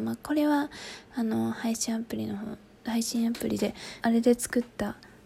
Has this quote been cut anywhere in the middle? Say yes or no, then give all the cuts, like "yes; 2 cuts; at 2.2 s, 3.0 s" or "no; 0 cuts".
yes; 1 cut; at 4.0 s